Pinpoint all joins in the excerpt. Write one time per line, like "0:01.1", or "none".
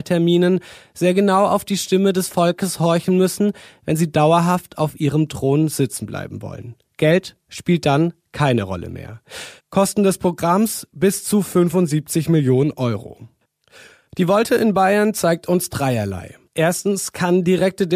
0:09.6

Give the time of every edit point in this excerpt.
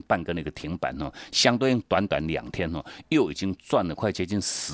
none

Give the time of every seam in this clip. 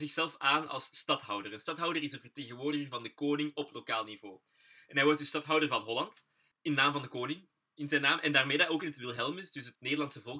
none

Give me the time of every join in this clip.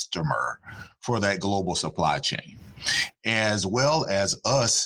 none

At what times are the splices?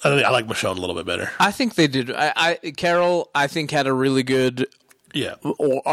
none

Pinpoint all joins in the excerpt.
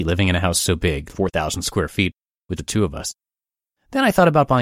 0:01.1
0:02.6

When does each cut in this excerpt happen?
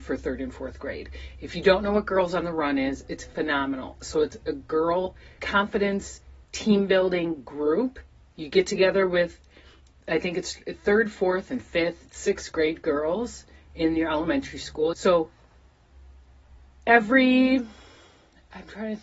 0:05.4
0:14.9

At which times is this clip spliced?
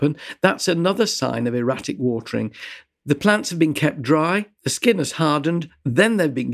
none

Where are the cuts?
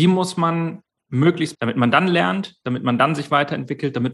0:01.5

